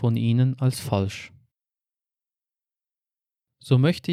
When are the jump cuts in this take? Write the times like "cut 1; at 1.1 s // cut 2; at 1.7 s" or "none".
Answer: none